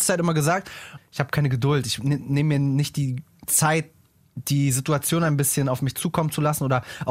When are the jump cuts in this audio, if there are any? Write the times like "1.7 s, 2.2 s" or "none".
1.0 s